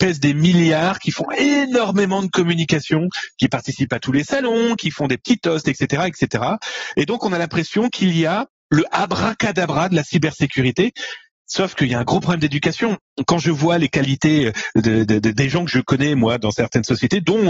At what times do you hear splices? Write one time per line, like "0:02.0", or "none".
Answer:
none